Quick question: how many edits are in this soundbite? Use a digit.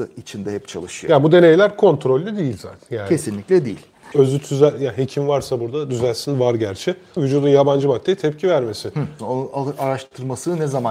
3